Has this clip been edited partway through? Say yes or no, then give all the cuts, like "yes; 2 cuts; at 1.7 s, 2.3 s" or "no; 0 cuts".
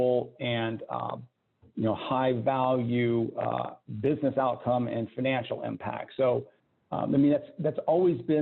no; 0 cuts